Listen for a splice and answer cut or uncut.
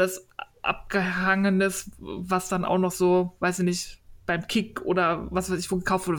uncut